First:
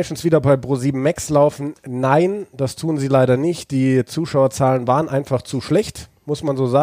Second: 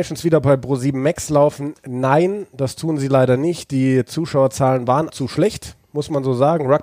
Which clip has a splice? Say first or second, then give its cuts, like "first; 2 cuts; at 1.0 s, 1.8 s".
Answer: second; 1 cut; at 5.1 s